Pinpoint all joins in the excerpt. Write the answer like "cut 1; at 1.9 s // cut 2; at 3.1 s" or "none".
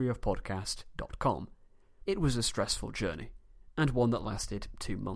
cut 1; at 2.1 s